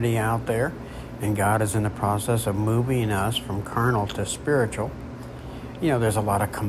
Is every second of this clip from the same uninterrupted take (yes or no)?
yes